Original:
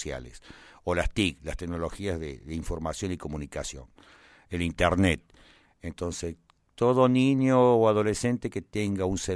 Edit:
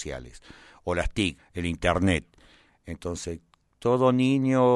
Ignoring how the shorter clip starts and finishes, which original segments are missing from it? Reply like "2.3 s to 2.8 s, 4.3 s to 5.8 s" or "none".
1.4 s to 4.3 s

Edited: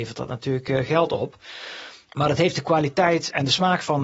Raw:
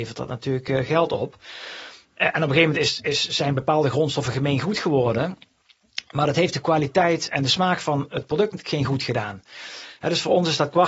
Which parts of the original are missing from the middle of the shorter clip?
2.1 s to 6.0 s

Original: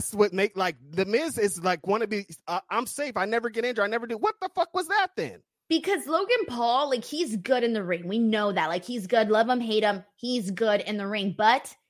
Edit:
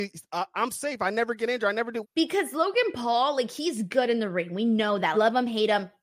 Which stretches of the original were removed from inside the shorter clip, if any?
4.2 s to 5.6 s, 8.7 s to 9.3 s

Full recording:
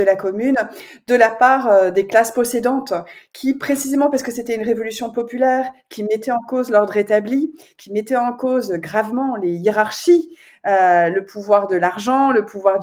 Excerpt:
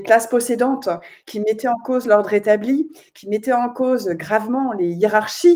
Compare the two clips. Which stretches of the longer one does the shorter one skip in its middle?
3.3 s to 5.9 s

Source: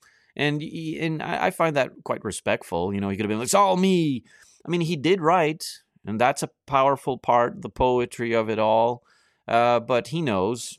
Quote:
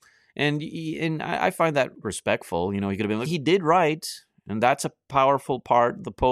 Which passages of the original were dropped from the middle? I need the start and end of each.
2.0 s to 2.2 s, 3.5 s to 4.8 s

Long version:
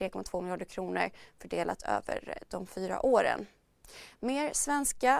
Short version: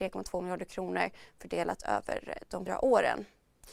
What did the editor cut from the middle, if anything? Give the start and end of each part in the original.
2.7 s to 2.9 s

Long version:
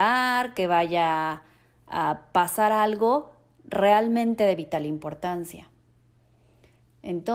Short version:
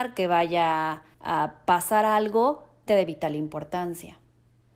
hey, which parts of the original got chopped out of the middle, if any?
1.5 s to 1.8 s, 3.5 s to 4.4 s

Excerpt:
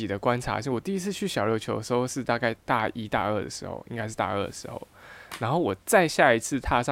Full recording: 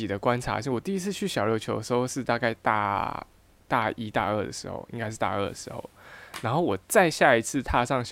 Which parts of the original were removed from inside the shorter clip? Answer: 2.6 s to 3.6 s

